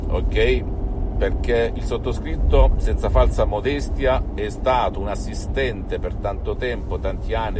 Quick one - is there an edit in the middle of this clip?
no; 0 cuts

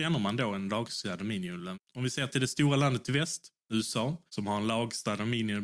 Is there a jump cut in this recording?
yes; 2 cuts; at 1.7 s, 4.3 s

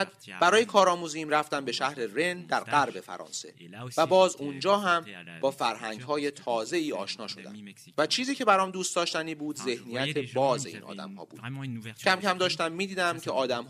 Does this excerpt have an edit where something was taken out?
no; 0 cuts

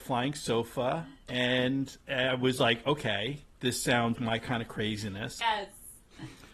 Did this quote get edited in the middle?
yes; 2 cuts; at 4.2 s, 5.4 s

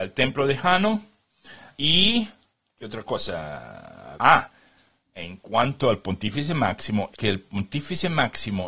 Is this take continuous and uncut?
no; 3 cuts; at 1.8 s, 4.2 s, 7.1 s

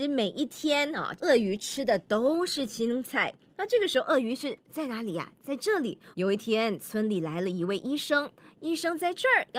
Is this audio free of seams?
no; 2 cuts; at 1.2 s, 6.1 s

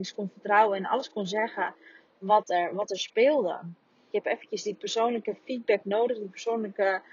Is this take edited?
yes; 1 cut; at 4.1 s

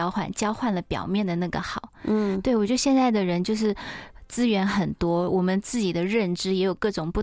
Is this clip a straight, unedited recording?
yes; 0 cuts

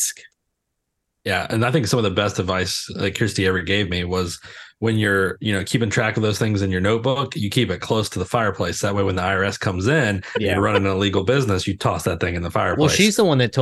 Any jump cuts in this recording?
no; 0 cuts

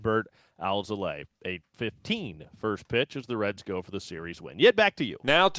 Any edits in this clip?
no; 0 cuts

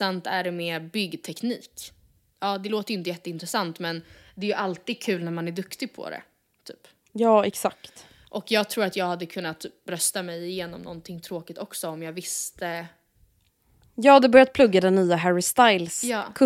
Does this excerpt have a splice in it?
no; 0 cuts

